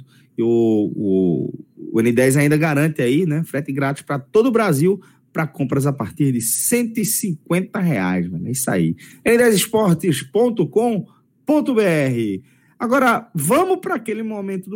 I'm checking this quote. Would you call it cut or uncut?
uncut